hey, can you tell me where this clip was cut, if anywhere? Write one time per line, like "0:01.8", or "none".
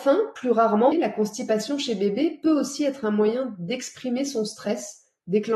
0:00.9